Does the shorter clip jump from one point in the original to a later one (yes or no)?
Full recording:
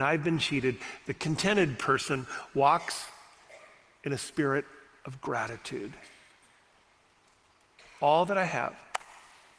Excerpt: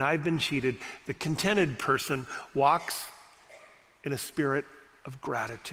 no